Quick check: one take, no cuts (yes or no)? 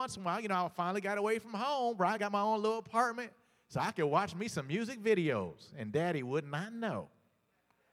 yes